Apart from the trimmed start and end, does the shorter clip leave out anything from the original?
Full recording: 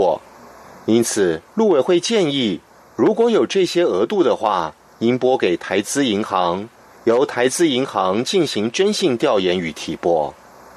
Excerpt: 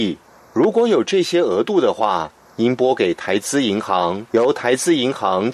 yes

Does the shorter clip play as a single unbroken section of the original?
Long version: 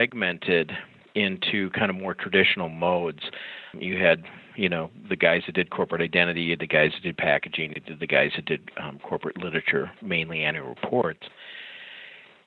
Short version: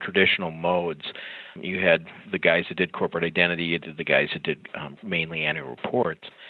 no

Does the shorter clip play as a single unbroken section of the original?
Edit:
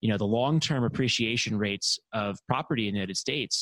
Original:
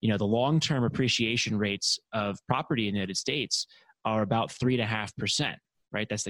yes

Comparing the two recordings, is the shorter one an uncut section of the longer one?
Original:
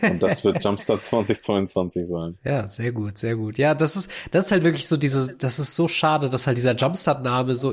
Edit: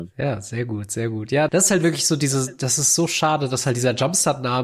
no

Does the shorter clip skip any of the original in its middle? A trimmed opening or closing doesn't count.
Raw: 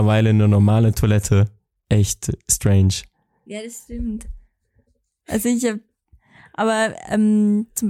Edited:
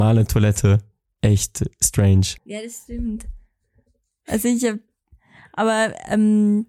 yes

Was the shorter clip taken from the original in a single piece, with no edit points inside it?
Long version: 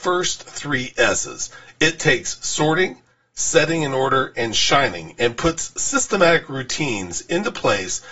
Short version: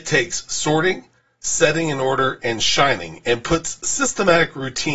yes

